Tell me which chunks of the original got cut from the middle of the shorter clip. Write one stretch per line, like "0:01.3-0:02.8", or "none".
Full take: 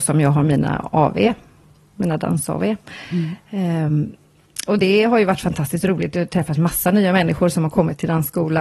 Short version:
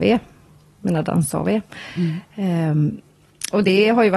none